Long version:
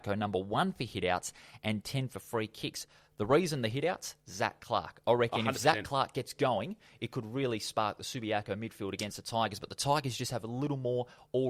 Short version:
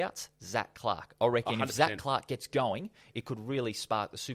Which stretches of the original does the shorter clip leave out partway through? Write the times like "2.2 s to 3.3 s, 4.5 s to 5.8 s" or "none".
none

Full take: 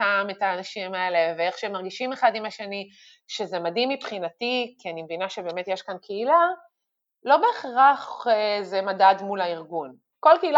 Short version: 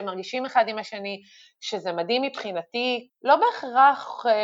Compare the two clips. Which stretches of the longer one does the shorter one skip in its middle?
4.7 s to 7.1 s

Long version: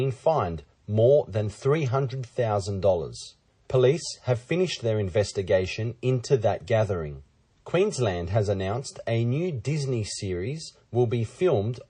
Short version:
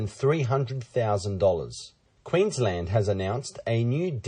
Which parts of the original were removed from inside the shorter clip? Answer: 3.6 s to 7.6 s

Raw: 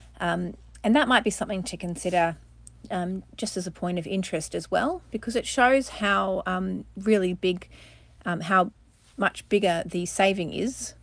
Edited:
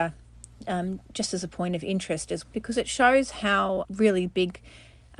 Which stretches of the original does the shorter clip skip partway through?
4.7 s to 5.0 s, 6.4 s to 6.9 s

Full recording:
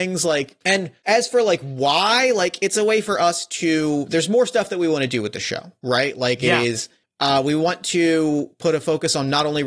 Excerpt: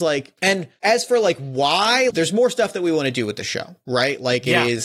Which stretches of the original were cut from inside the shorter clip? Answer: 2.3 s to 4.1 s

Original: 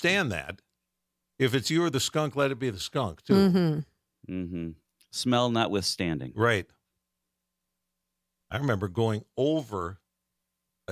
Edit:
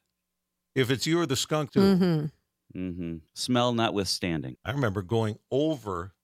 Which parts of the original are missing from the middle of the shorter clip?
2.3 s to 3.2 s, 4.8 s to 5.0 s, 6.3 s to 8.4 s

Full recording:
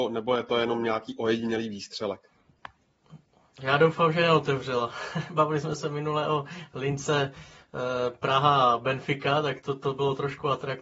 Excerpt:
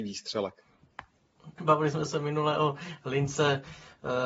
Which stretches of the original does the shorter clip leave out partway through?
3.2 s to 5.3 s

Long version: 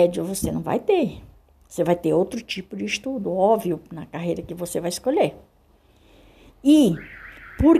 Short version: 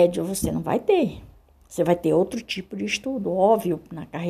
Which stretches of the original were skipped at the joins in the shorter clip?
none

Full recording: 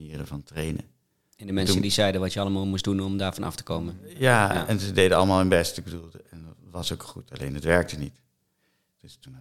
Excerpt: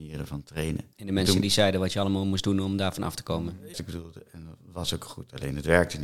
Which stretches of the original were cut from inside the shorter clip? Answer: 0.9 s to 1.3 s, 4.1 s to 5.7 s

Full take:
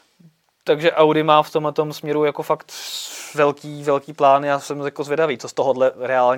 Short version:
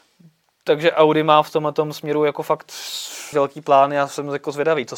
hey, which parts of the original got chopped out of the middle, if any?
3.3 s to 3.8 s

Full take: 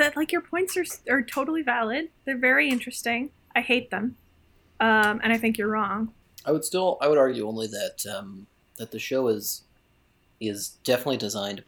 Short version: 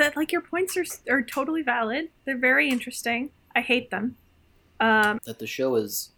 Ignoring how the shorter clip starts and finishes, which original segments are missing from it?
5.2 s to 8.7 s

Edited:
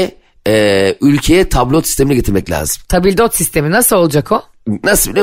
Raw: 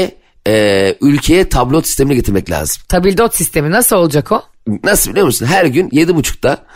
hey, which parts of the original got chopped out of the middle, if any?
none

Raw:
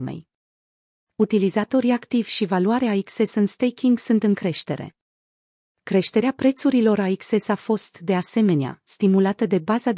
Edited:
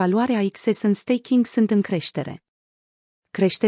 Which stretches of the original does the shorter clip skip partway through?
none

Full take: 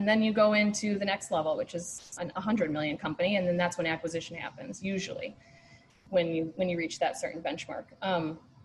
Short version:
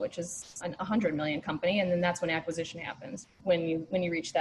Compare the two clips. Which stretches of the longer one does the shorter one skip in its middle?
4.8 s to 5.9 s

